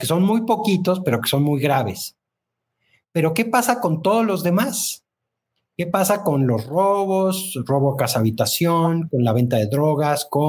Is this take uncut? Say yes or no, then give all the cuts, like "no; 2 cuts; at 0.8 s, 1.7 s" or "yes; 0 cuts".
yes; 0 cuts